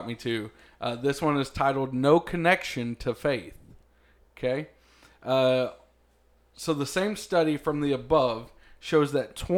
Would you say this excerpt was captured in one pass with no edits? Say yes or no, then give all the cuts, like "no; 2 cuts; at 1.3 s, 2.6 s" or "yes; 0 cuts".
yes; 0 cuts